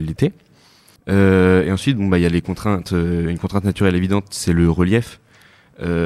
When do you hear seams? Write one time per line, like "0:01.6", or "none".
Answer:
0:01.0